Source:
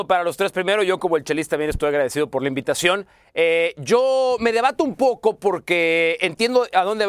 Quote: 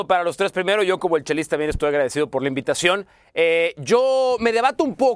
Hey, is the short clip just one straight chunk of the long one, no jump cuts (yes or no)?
yes